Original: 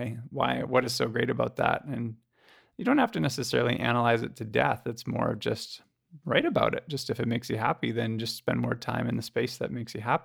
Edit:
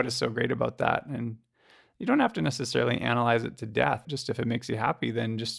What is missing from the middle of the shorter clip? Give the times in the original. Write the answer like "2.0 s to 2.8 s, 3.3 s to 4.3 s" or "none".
4.8 s to 6.9 s